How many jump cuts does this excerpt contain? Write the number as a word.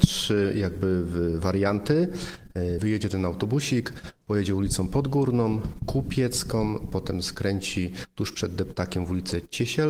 one